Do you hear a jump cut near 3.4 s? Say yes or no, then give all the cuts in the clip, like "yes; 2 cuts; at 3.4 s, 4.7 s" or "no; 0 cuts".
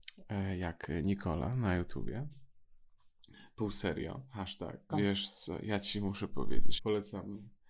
no; 2 cuts; at 4.9 s, 6.8 s